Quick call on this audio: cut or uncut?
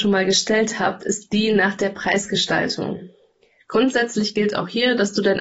uncut